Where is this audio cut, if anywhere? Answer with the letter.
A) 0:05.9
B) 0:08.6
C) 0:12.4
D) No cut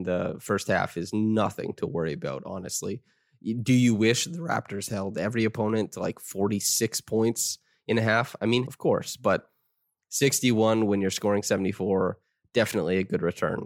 B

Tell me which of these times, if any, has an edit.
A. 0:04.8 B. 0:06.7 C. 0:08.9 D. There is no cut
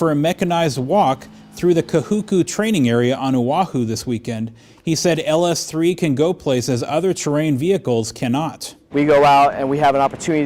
C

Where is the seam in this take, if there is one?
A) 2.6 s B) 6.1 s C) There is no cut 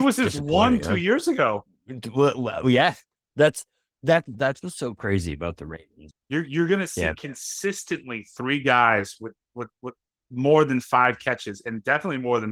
B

